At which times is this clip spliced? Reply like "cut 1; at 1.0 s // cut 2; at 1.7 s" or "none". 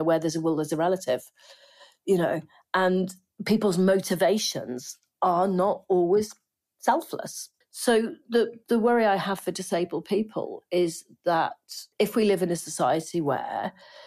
cut 1; at 7.6 s // cut 2; at 11.9 s